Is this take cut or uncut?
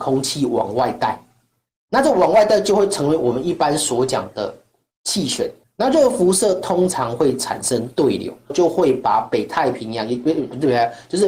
cut